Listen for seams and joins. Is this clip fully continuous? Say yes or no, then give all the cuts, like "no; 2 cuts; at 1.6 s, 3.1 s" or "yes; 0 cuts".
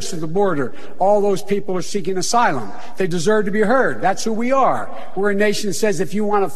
yes; 0 cuts